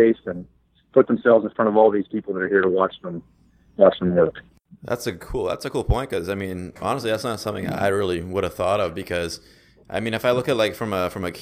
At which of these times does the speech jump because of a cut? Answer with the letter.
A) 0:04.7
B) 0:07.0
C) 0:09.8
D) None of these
D